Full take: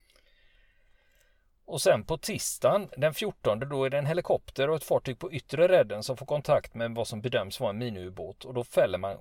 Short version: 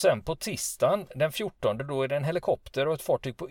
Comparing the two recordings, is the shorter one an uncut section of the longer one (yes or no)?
yes